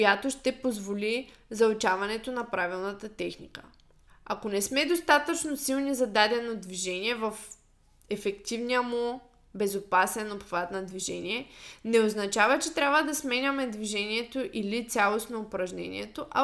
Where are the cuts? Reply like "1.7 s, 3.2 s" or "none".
4.1 s